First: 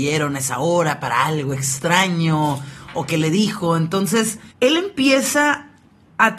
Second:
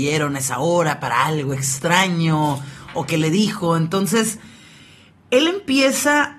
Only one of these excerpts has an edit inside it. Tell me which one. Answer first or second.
first